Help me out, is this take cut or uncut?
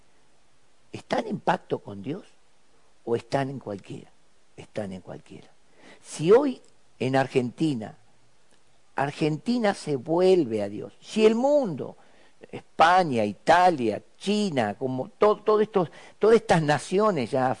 uncut